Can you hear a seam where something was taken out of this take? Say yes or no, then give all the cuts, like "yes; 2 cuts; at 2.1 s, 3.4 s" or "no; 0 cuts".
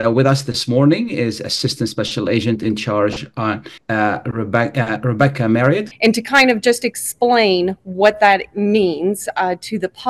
yes; 2 cuts; at 3.8 s, 5.9 s